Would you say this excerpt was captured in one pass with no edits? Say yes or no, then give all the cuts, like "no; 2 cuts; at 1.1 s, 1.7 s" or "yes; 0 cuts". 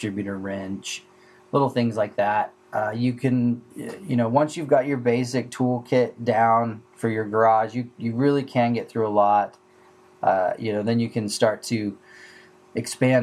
yes; 0 cuts